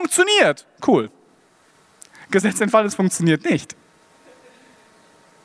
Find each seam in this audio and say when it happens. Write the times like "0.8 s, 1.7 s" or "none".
none